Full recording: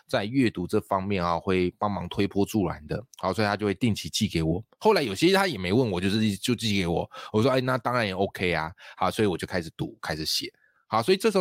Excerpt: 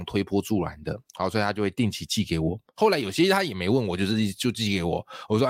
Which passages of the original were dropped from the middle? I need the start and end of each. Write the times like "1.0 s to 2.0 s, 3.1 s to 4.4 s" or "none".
none